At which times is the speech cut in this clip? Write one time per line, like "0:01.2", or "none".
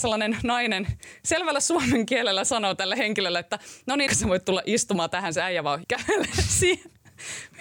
0:04.1
0:05.8